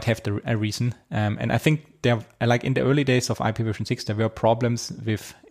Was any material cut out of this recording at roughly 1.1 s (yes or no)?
no